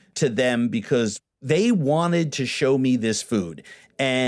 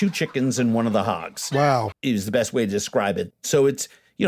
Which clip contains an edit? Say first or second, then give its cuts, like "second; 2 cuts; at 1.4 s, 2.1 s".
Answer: second; 2 cuts; at 1.9 s, 3.3 s